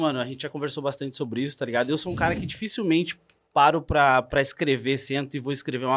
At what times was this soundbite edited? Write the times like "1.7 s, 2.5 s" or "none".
none